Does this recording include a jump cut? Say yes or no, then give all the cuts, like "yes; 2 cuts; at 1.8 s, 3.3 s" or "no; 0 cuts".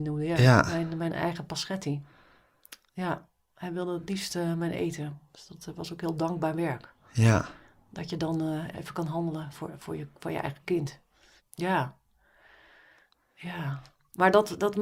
yes; 2 cuts; at 8.7 s, 11.4 s